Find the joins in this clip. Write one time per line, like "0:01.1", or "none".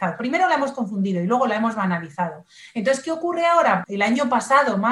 0:03.8